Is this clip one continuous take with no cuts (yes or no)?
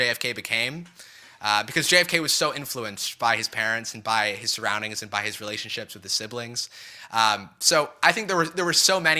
yes